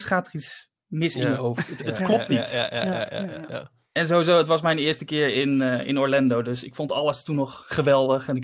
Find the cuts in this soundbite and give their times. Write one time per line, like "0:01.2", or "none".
none

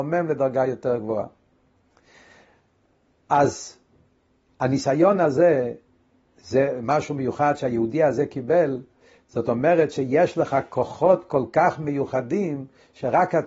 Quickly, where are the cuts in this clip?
0:06.3

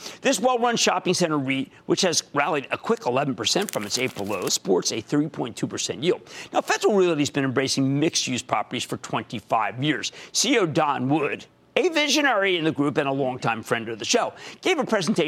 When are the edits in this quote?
0:04.5

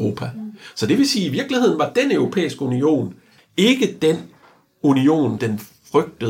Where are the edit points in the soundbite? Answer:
0:03.4
0:05.4

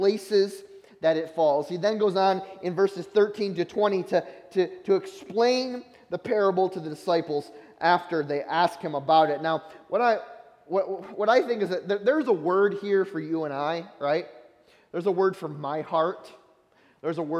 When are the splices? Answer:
none

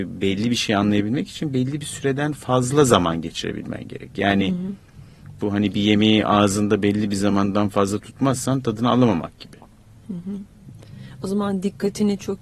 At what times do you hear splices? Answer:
0:09.9

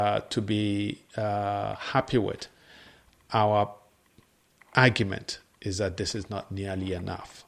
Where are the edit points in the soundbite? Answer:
none

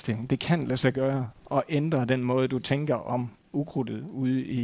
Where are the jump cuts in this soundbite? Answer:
none

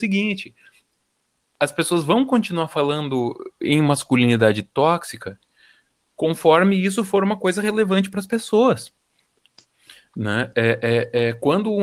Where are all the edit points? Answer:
none

